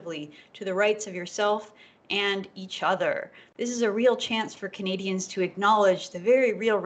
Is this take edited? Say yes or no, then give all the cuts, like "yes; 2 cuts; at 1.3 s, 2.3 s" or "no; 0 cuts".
no; 0 cuts